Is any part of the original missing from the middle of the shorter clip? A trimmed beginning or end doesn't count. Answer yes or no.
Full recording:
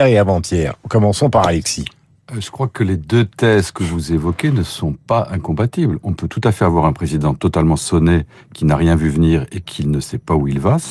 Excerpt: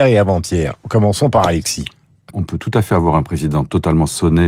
yes